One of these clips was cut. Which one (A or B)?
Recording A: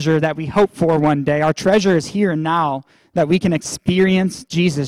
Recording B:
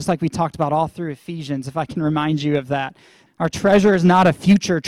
B